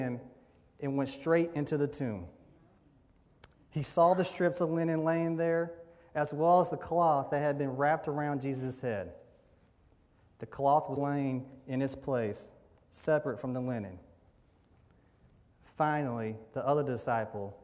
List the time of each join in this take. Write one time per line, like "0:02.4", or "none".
0:11.0